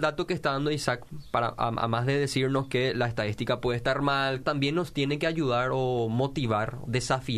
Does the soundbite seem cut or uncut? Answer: cut